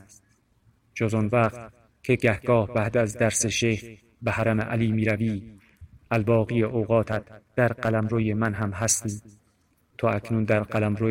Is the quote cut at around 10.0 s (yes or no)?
yes